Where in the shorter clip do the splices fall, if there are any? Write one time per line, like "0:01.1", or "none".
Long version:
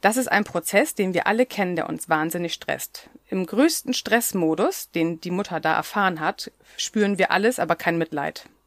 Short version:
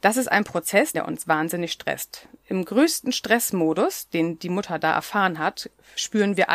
0:00.9